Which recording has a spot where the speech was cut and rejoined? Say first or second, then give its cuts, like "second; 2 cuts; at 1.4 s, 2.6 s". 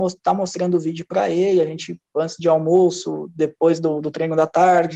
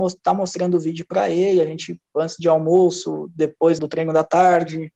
second; 1 cut; at 3.8 s